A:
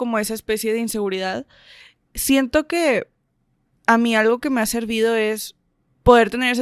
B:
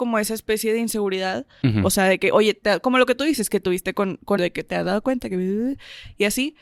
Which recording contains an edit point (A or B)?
B